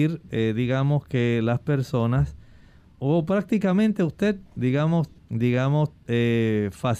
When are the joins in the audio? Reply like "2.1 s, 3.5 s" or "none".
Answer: 5.2 s